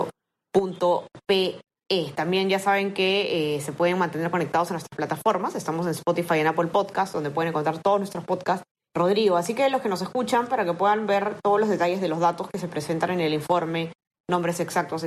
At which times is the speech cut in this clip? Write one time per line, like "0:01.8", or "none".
0:08.9